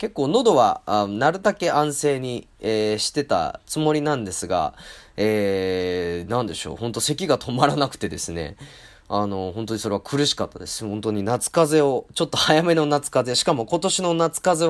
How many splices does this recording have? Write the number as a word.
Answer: zero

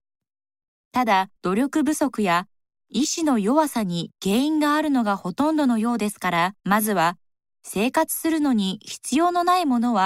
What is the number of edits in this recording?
two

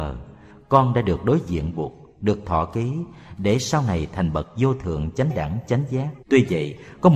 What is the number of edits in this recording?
one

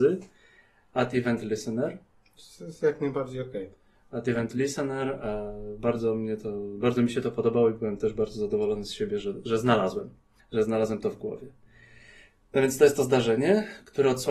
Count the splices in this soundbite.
one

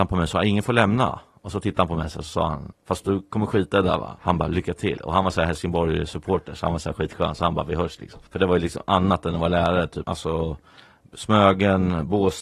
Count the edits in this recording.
three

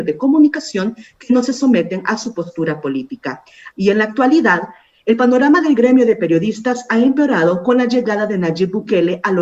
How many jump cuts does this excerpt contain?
one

